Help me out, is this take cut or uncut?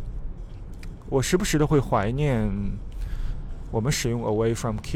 uncut